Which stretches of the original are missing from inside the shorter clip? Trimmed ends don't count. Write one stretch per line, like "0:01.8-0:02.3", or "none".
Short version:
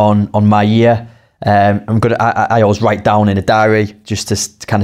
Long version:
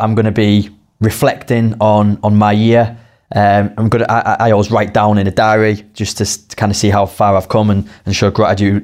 none